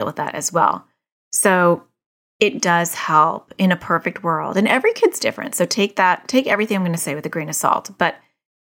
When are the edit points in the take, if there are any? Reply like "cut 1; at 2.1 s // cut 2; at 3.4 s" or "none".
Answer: cut 1; at 1.1 s // cut 2; at 2.6 s

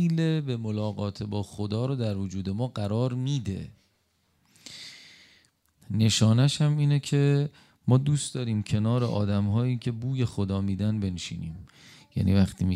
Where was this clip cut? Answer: none

